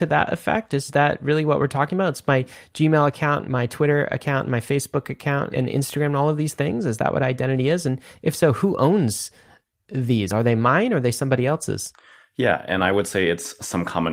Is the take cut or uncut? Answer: uncut